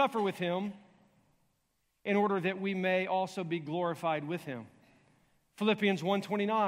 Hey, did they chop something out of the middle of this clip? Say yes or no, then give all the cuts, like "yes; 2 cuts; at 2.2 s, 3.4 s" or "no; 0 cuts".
no; 0 cuts